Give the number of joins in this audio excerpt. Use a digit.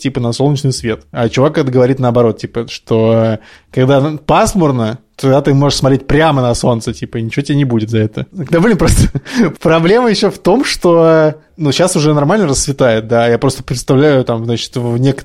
2